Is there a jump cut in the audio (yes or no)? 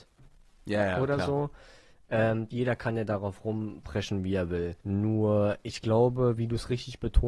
yes